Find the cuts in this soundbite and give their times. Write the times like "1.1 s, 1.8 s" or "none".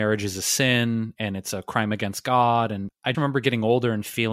3.1 s